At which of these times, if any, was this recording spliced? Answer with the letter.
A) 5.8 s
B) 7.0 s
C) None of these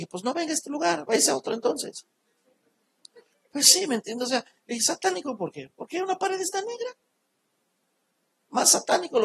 C